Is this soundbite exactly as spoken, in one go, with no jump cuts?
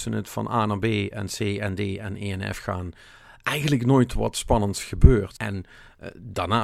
no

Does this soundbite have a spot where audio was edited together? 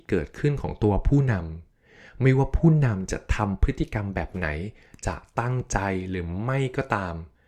no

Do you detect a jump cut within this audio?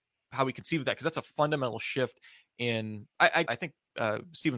yes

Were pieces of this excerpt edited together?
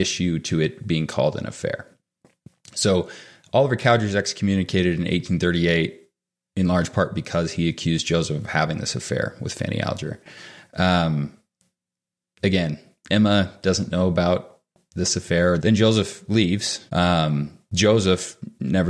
yes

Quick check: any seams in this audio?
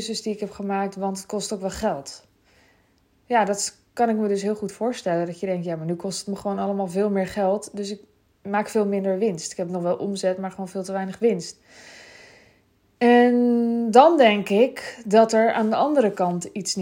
no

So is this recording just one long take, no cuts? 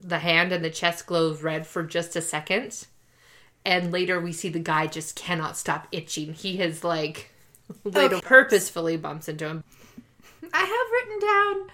no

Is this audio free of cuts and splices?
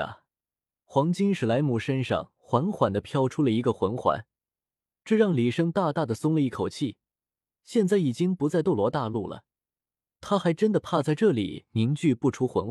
yes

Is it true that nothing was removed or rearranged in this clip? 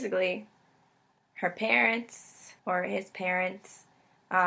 no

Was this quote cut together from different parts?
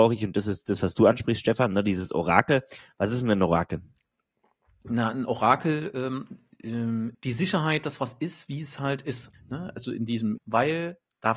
yes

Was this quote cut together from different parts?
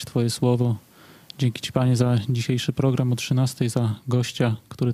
no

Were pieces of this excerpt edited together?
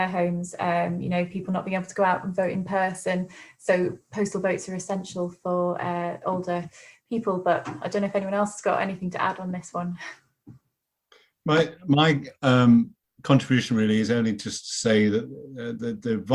no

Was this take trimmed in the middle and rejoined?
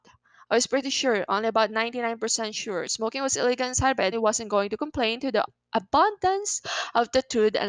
yes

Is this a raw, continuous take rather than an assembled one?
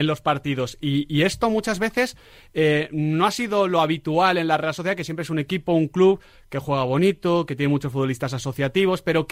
yes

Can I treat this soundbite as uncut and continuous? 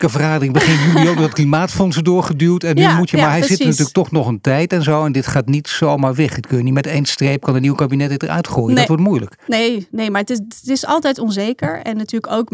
yes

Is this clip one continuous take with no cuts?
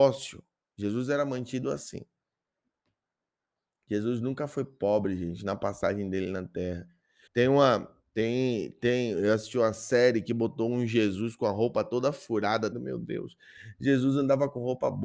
no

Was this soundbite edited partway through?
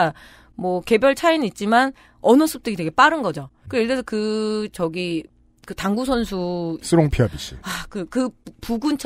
no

